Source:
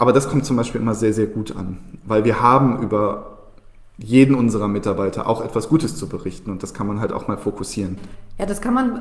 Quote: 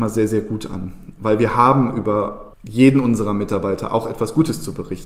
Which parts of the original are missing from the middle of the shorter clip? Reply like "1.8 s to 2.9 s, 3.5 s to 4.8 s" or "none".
3.4 s to 3.9 s